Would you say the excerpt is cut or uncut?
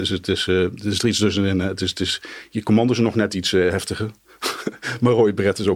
uncut